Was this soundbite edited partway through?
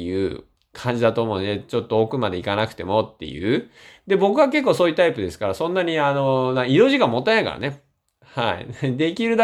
no; 0 cuts

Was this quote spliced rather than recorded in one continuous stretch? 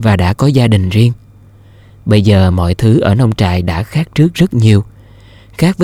no; 0 cuts

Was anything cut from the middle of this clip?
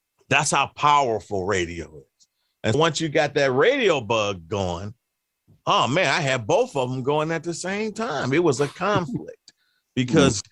yes; 1 cut; at 2.7 s

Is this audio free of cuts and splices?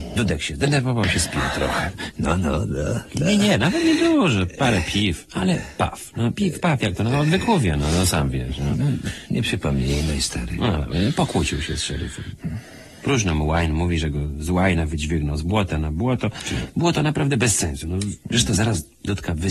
yes; 0 cuts

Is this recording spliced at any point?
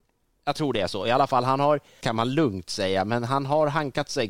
yes; 1 cut; at 2.0 s

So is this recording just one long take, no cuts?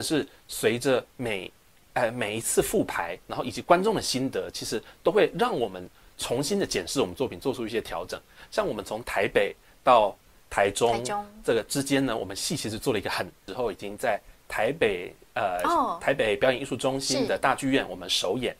no; 1 cut; at 13.5 s

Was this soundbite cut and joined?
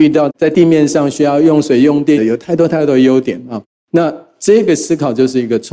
yes; 1 cut; at 2.2 s

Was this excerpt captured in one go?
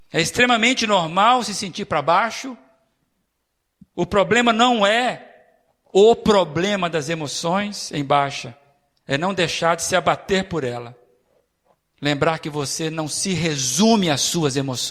yes; 0 cuts

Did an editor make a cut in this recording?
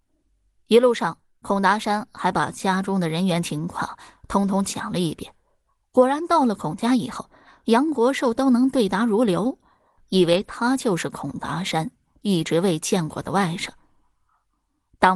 yes; 1 cut; at 10.0 s

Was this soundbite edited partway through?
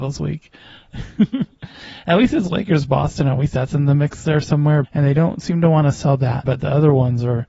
yes; 2 cuts; at 4.8 s, 6.4 s

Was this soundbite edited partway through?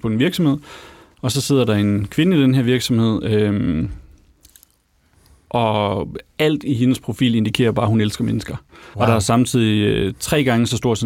yes; 1 cut; at 8.9 s

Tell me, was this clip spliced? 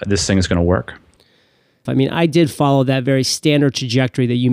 yes; 1 cut; at 1.9 s

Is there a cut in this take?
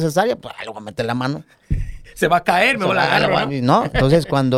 no; 0 cuts

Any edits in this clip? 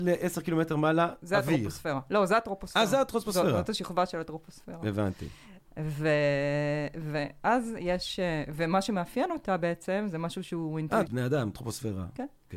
yes; 1 cut; at 11.1 s

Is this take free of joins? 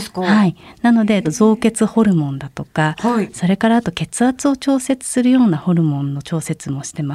yes; 0 cuts

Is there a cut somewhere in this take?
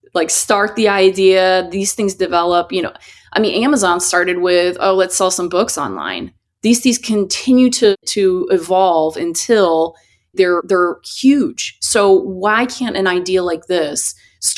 no; 0 cuts

